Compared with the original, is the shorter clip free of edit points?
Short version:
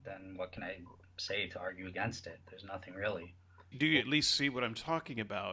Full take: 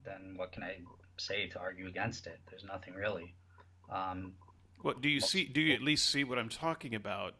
no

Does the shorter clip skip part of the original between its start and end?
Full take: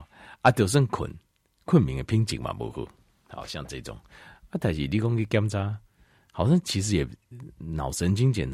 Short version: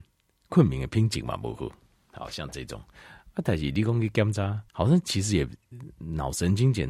yes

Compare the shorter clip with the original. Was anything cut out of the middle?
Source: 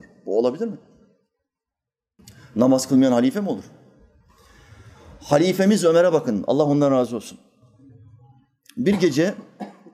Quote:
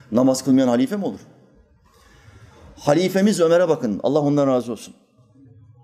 no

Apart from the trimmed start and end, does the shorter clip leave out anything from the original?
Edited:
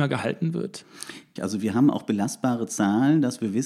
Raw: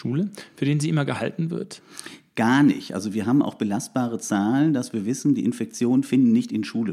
yes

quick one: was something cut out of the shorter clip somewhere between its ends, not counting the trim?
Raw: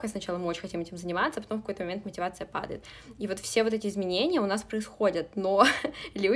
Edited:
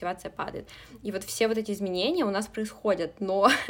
no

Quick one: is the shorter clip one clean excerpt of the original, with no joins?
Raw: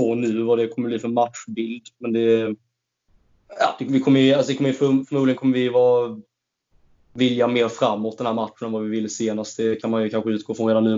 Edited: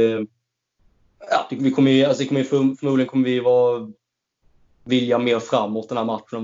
yes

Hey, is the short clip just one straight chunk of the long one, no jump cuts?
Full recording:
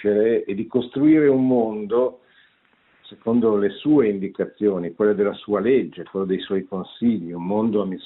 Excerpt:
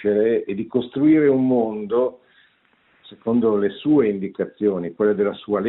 yes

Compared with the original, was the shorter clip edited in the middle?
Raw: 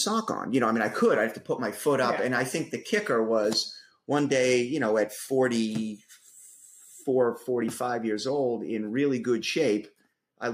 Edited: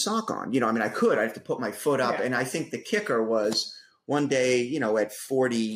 no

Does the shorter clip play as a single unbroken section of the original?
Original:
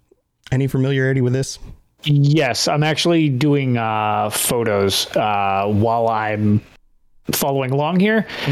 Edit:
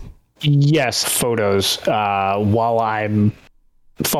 no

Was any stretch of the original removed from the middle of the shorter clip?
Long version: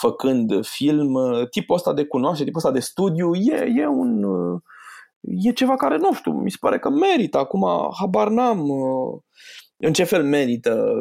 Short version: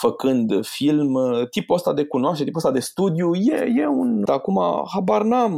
yes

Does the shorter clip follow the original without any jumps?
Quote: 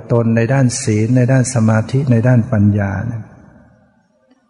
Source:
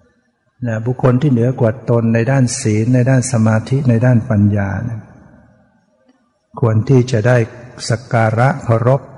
yes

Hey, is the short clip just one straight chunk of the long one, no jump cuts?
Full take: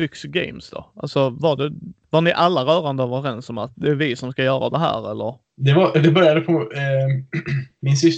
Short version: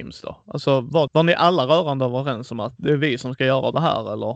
no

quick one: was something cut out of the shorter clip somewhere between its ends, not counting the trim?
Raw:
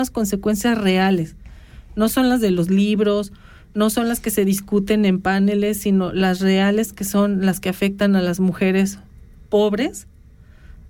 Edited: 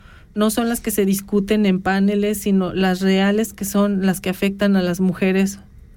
no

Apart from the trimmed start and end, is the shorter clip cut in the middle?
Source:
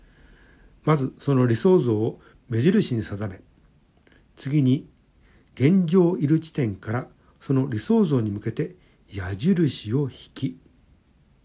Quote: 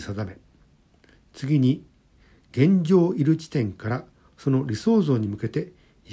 no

